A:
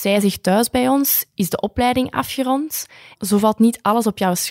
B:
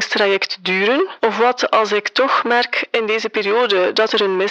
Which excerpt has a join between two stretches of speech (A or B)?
A